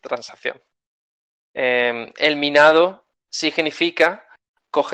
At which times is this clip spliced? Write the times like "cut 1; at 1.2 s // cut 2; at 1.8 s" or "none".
cut 1; at 1.4 s // cut 2; at 3.3 s